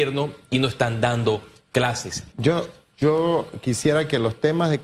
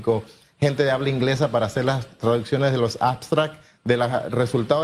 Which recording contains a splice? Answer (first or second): first